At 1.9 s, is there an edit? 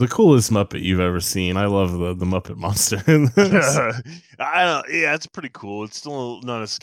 no; 0 cuts

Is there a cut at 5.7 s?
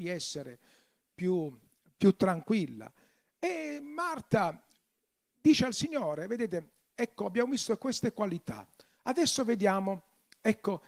yes; 1 cut; at 5.7 s

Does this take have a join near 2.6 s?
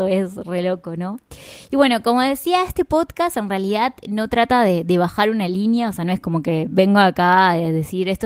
no; 0 cuts

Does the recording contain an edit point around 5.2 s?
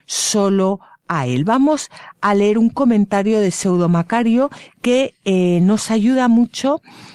no; 0 cuts

